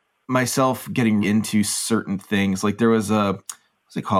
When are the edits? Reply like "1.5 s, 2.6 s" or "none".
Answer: 1.2 s

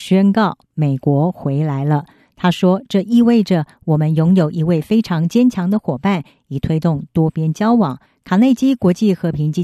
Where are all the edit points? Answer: 8.1 s

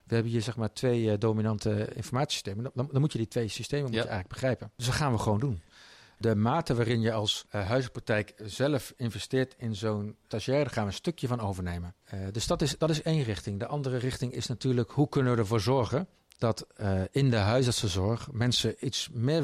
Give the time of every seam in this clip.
none

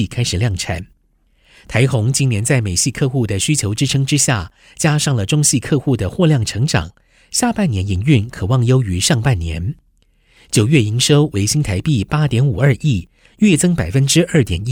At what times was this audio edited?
none

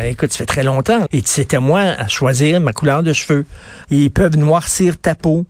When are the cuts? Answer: 1.1 s, 3.8 s

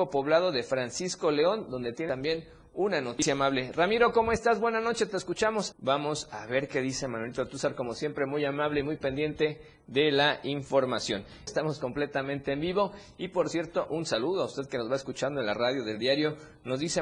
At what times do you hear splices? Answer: 5.7 s, 11.5 s

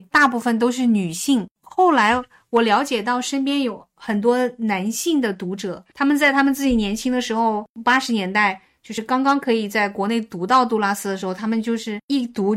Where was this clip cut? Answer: none

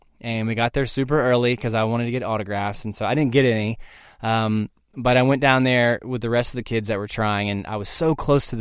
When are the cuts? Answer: none

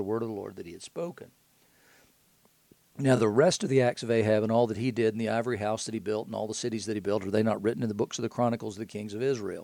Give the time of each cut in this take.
none

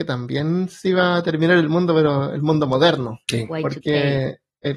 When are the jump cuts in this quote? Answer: 3.2 s

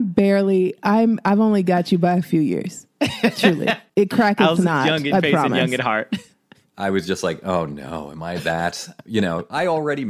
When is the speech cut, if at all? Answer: 3.9 s

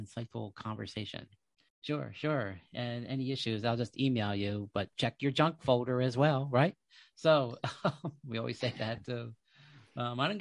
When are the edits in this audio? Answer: 1.7 s

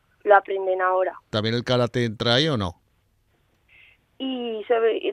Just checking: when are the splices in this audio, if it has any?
1.3 s, 4.0 s

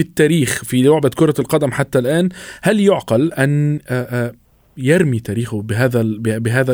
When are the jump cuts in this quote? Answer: none

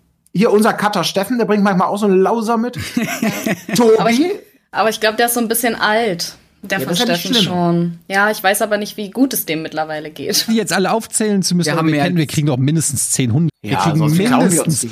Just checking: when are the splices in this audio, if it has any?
10.5 s, 13.5 s

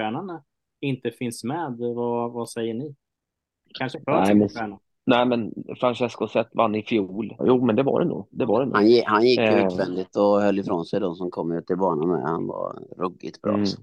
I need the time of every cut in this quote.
5.0 s, 7.4 s

